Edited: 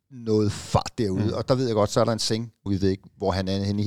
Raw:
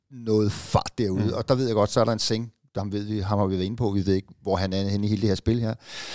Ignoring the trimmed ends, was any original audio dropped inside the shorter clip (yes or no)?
yes